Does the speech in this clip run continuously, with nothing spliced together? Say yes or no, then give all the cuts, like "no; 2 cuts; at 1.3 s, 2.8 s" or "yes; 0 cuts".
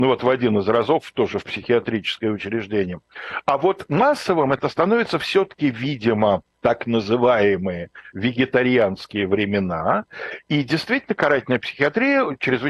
no; 1 cut; at 6.5 s